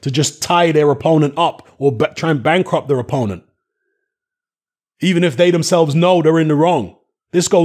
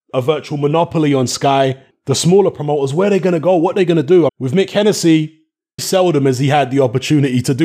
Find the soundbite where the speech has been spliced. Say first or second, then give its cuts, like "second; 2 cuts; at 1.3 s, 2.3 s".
second; 3 cuts; at 1.9 s, 4.3 s, 5.8 s